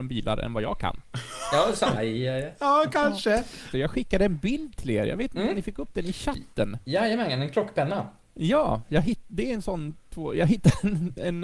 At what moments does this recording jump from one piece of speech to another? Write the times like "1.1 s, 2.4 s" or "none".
1.9 s, 3.7 s